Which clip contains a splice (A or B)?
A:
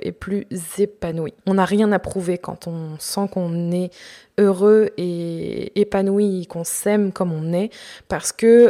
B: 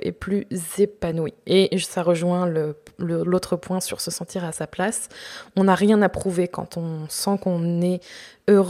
A